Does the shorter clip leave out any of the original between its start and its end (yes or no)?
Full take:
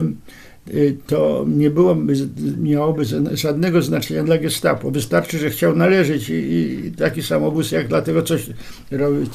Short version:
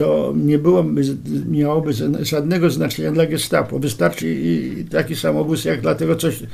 yes